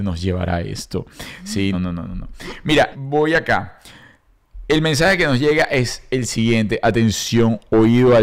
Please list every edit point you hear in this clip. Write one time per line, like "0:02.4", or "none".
0:01.7
0:02.9